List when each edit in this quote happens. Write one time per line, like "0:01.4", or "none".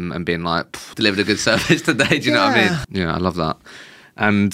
0:00.9
0:02.8